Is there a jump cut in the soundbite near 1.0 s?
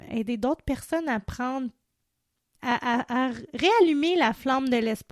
no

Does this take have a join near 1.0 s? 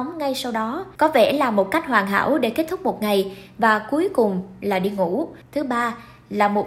yes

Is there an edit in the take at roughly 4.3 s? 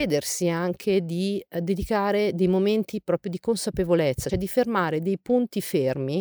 yes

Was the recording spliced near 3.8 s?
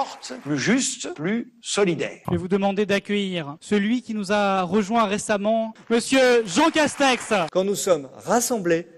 no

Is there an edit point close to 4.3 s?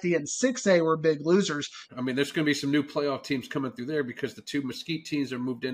no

